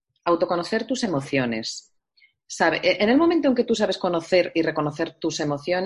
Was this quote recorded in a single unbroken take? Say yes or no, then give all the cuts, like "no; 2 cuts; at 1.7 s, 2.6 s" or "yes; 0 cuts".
yes; 0 cuts